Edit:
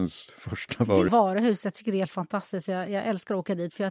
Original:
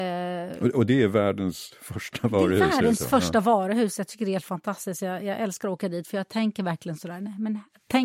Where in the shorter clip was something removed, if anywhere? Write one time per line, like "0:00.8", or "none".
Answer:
0:01.1